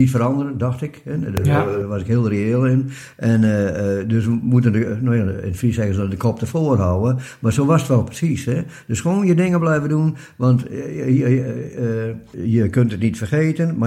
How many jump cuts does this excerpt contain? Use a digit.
0